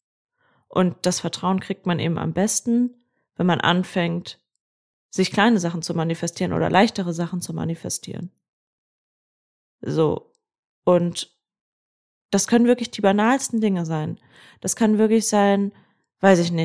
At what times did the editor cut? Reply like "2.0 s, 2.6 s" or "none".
none